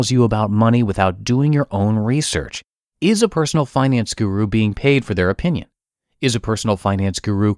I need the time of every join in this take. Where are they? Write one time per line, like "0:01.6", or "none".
0:02.9